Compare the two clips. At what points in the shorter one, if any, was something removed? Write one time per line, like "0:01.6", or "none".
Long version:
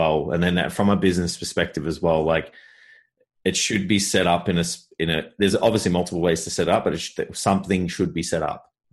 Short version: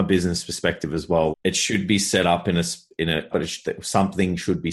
0:01.3
0:03.3